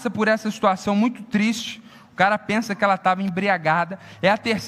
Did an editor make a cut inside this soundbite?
no; 0 cuts

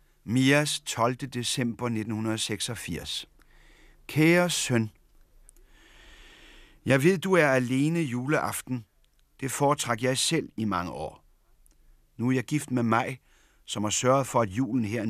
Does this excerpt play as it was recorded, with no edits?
yes; 0 cuts

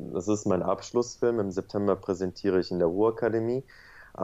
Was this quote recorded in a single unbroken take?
yes; 0 cuts

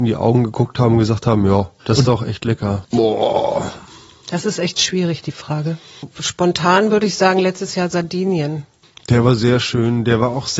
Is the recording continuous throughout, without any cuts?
no; 1 cut; at 2.8 s

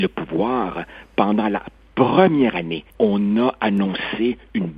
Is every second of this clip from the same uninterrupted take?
no; 1 cut; at 2.9 s

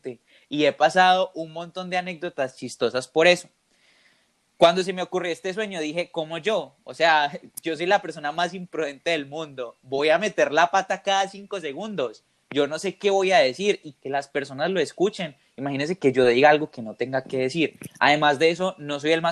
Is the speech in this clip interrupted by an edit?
no; 0 cuts

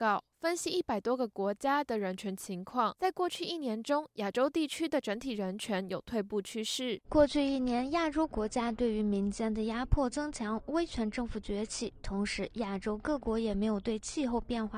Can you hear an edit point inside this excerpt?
yes; 1 cut; at 7.0 s

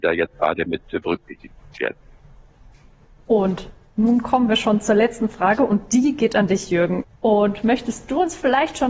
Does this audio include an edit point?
yes; 2 cuts; at 3.2 s, 7.0 s

